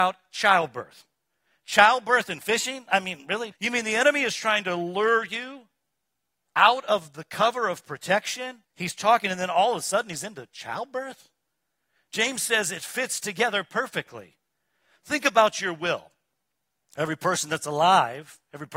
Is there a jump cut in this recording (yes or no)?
yes